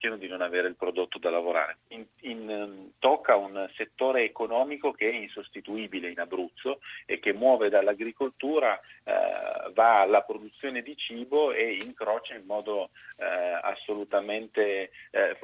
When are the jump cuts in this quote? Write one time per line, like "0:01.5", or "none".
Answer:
0:01.8